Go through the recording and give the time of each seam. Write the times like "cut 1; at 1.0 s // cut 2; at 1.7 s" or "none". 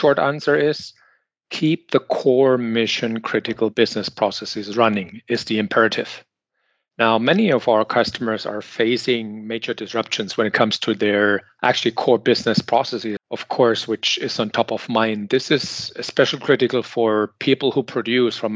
cut 1; at 13.2 s